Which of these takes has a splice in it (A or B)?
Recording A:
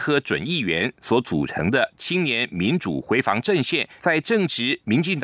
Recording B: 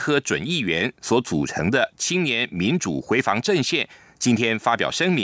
A